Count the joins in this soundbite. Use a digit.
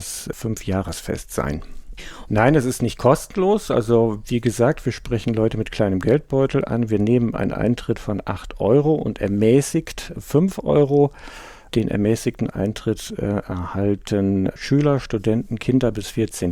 1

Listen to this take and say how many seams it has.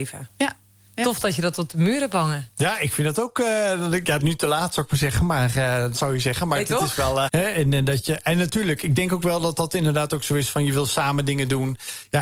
3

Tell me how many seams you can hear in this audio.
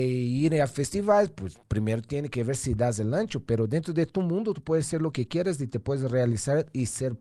0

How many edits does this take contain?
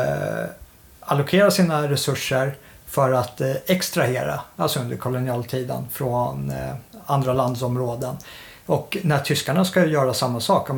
0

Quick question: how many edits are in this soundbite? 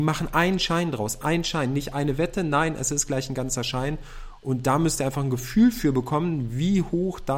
0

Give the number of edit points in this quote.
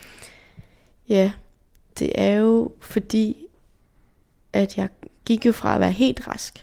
0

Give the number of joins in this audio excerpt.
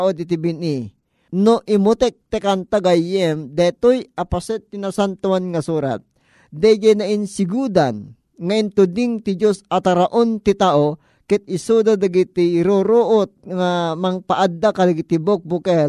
1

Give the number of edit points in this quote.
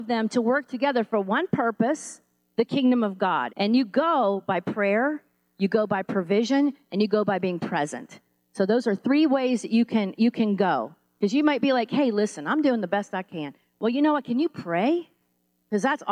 1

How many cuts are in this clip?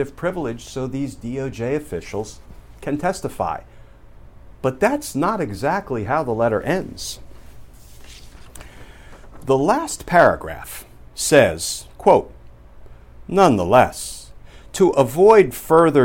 0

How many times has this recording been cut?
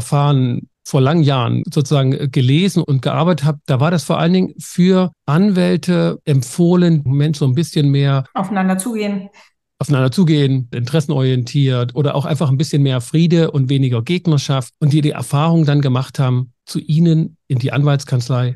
2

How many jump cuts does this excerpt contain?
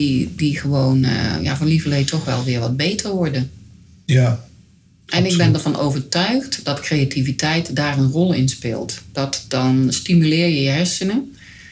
0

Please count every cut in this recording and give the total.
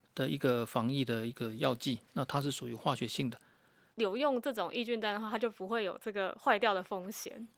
1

